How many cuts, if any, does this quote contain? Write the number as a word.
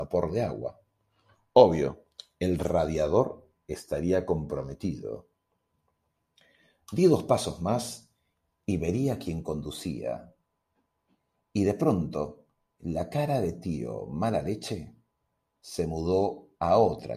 zero